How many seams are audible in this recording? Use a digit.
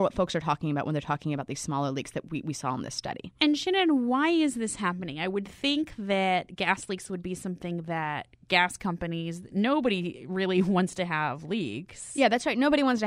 0